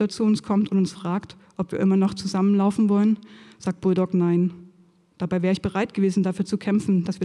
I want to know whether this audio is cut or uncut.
uncut